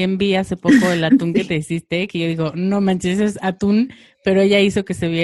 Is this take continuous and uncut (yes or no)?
yes